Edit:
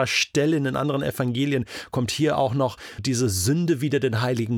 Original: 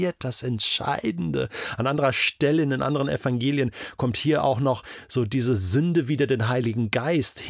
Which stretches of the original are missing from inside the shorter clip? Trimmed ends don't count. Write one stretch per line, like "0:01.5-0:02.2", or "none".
0:05.0-0:05.3